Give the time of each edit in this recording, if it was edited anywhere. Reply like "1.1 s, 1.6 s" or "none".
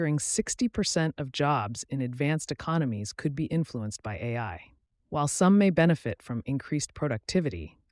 none